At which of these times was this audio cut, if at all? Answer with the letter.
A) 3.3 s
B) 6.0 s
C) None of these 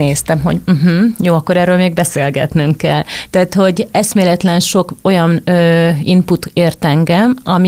C